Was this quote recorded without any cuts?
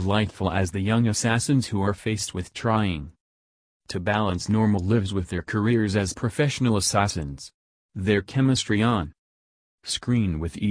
yes; 0 cuts

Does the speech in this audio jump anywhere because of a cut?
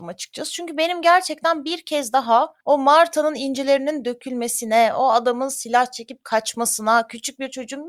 no; 0 cuts

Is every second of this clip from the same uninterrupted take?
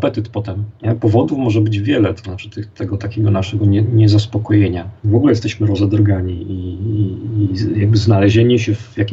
yes; 0 cuts

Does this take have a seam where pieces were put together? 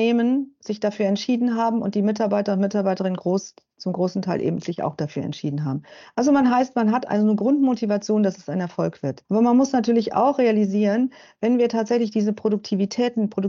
yes; 1 cut; at 9.2 s

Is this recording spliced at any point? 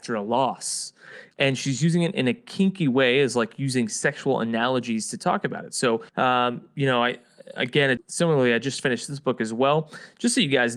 yes; 3 cuts; at 1.3 s, 6.1 s, 8.0 s

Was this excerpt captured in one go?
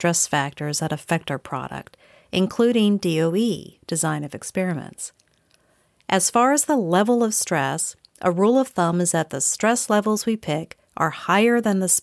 yes; 0 cuts

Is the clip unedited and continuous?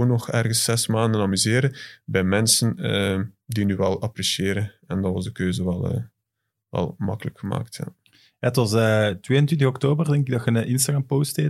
yes; 0 cuts

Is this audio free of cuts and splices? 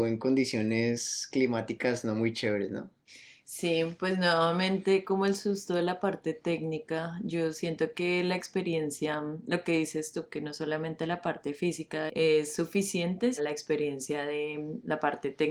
no; 1 cut; at 13.4 s

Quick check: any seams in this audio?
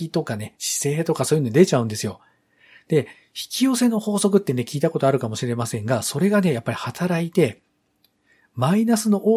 no; 0 cuts

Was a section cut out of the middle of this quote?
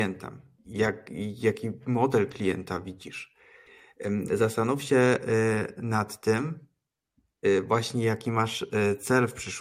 no; 0 cuts

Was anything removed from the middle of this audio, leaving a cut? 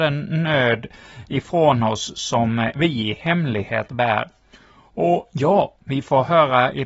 no; 0 cuts

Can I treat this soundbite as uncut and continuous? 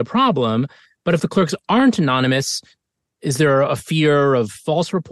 yes; 0 cuts

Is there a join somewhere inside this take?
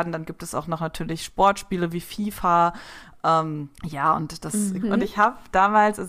yes; 2 cuts; at 3.7 s, 4.8 s

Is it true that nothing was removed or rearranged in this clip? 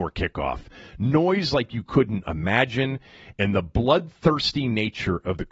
yes; 0 cuts

